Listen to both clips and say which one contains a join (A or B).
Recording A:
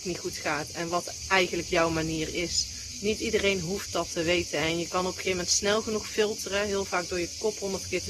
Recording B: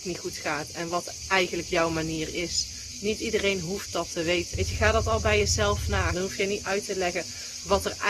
B